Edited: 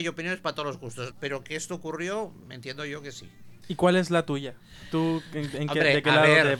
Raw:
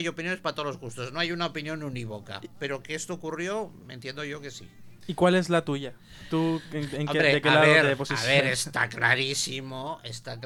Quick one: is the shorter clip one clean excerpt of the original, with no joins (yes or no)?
no